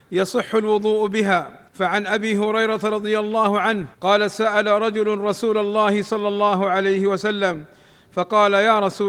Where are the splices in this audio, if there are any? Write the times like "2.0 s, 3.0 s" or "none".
1.7 s, 3.9 s